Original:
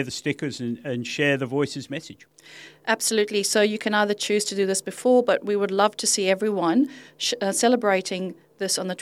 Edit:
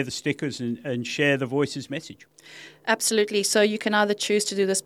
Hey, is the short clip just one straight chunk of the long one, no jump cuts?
yes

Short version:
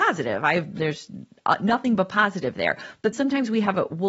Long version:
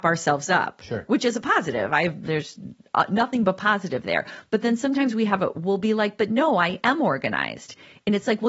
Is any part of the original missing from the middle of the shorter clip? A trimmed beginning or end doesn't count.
yes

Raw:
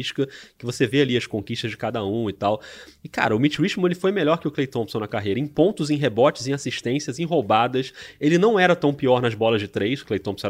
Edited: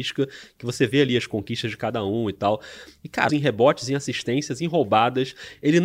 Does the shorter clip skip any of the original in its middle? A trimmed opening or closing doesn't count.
yes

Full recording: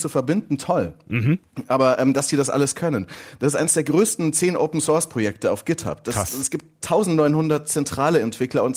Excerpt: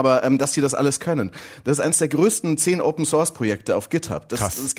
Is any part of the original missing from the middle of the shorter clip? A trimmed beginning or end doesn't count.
no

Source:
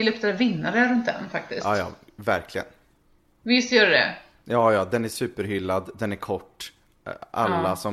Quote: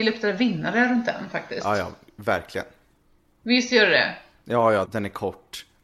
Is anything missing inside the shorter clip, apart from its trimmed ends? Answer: yes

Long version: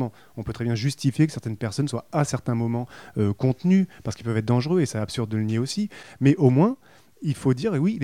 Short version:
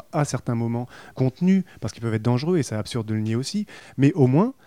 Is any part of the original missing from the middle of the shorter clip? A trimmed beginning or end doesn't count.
yes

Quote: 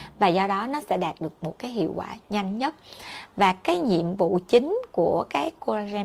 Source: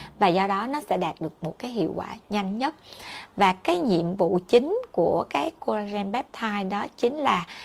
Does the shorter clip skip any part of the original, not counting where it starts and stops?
no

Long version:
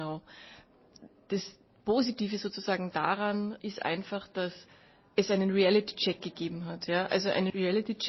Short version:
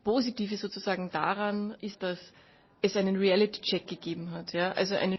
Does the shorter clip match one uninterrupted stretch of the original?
no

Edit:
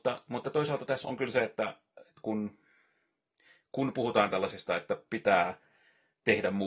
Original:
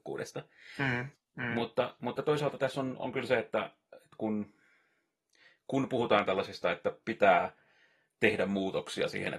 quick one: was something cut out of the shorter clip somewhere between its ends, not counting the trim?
yes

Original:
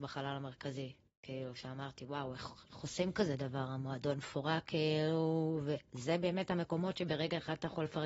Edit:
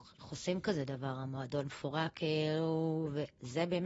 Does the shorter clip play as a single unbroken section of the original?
yes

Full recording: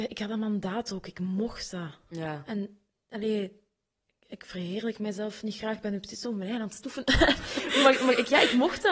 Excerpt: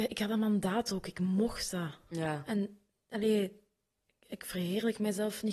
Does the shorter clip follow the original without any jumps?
yes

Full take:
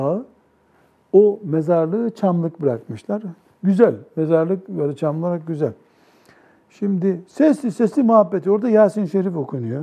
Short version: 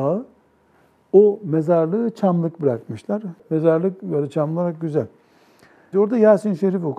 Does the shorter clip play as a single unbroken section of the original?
no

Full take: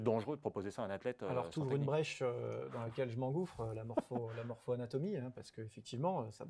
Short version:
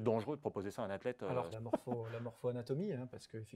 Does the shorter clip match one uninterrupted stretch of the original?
no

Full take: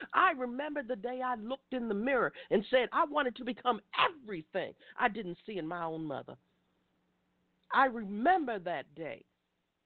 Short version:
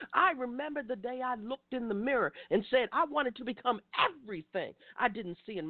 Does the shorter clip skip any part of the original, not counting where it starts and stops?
no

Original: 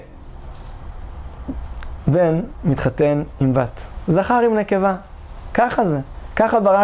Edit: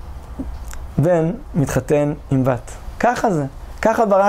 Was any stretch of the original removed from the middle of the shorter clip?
yes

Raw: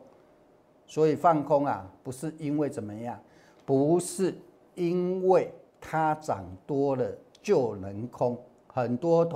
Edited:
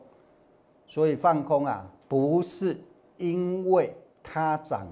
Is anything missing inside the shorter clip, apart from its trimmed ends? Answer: yes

